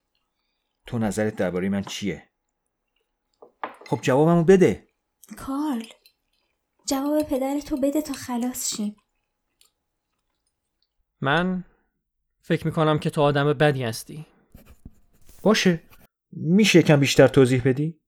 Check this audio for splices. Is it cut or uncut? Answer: uncut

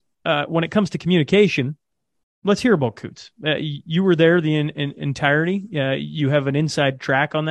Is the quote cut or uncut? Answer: cut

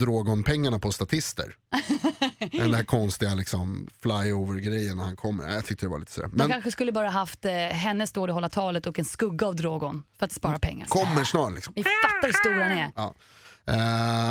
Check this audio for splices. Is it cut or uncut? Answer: cut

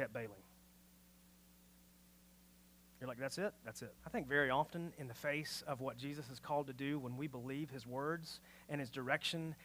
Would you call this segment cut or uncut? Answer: cut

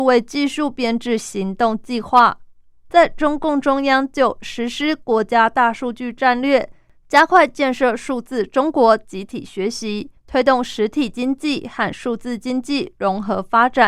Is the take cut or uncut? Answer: cut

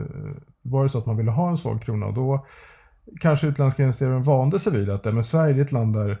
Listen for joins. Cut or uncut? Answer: uncut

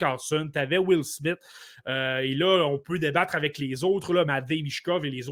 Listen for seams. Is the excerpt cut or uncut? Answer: uncut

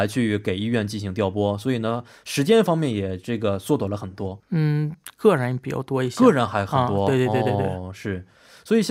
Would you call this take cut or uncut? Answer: cut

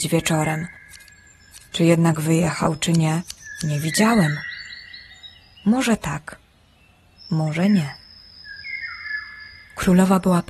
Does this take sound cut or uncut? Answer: uncut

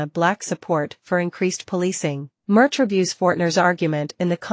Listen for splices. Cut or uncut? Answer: cut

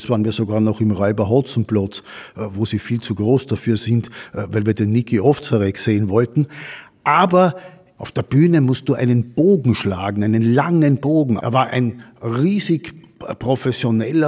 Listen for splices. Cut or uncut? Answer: cut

